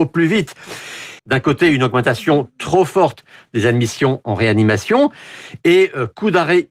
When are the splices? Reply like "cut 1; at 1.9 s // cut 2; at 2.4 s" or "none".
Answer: cut 1; at 1.2 s